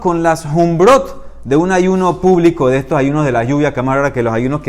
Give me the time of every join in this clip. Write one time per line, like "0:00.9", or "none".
none